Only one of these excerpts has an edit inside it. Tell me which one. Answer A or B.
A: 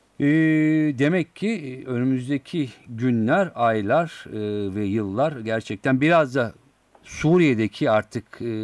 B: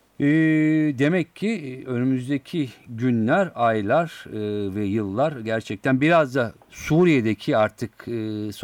B